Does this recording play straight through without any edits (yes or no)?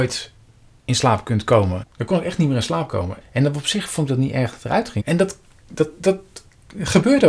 no